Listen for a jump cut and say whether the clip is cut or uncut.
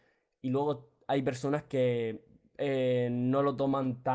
uncut